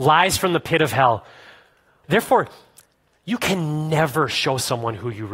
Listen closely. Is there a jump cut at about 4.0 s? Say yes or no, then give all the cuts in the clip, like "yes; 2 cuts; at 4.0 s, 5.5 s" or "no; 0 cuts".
no; 1 cut; at 2.0 s